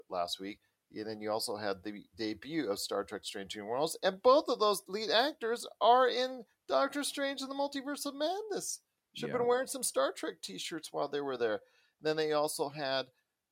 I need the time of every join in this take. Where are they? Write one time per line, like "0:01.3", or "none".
none

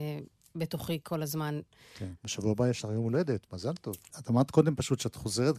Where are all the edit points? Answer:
0:02.2
0:04.1

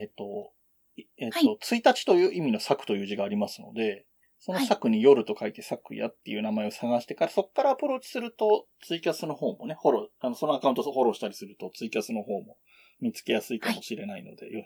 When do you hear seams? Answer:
none

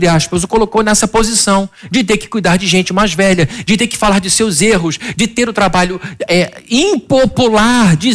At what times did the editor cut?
none

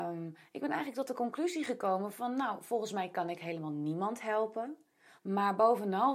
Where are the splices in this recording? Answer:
0:05.2

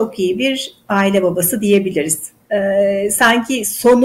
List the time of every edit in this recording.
0:02.4

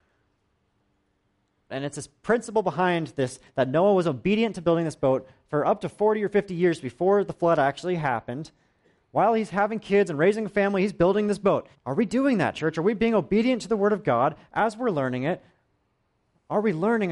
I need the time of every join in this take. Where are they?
0:01.7
0:11.7

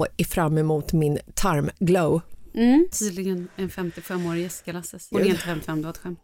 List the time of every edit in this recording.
0:02.9
0:05.1

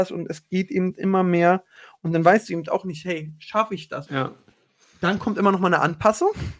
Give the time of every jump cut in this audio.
0:04.1

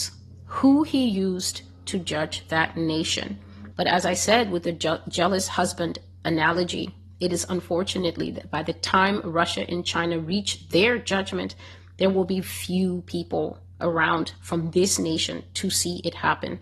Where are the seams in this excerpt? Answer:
0:03.7
0:12.4

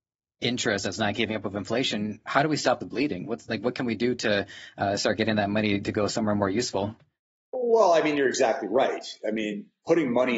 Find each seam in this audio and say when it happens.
none

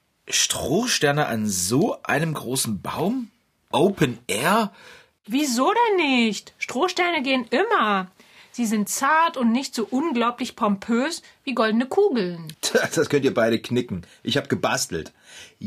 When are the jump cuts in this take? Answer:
0:05.2
0:12.5

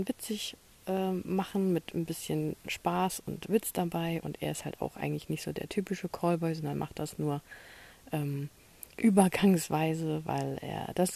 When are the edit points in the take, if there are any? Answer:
0:04.2

